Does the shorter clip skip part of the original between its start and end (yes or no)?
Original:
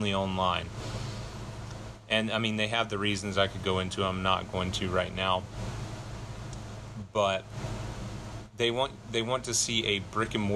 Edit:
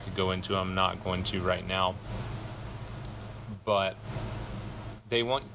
no